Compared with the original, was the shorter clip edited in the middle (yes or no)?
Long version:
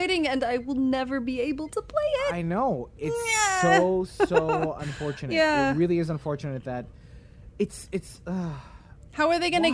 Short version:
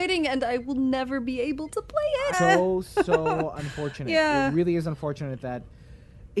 yes